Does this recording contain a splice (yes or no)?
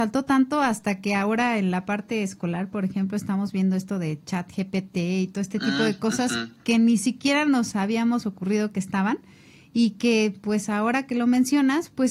no